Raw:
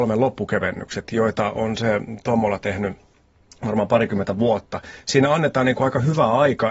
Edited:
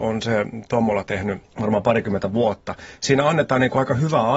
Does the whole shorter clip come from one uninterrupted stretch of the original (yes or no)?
no